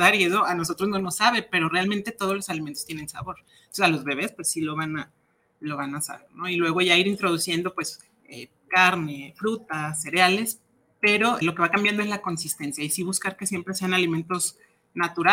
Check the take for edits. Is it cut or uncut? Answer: cut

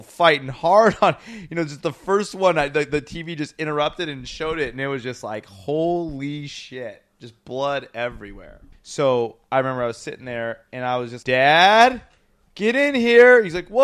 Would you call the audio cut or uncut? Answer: cut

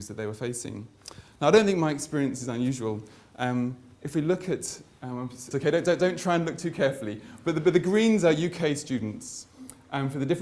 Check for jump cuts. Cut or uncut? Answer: cut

